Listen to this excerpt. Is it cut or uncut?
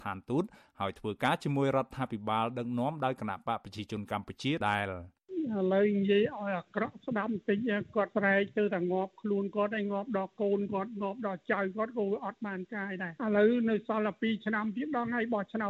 cut